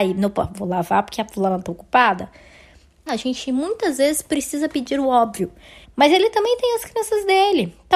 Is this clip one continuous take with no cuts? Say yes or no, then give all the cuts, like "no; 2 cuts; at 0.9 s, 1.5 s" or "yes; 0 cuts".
no; 2 cuts; at 3.1 s, 5.8 s